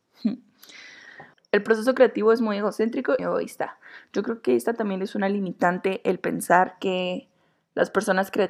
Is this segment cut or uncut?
cut